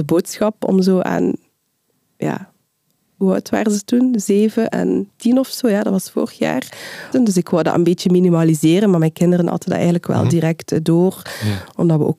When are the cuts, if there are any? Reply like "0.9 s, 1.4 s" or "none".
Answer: 4.7 s, 7.1 s